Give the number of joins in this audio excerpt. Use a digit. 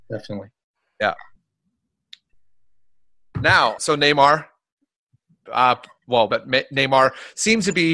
2